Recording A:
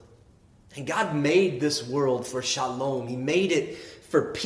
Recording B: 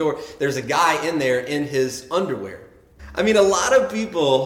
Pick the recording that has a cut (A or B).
B